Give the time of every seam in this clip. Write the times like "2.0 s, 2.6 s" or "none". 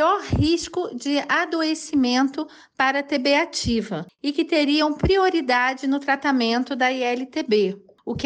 none